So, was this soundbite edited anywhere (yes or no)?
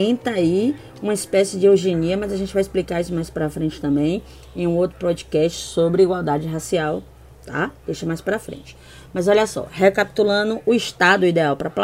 no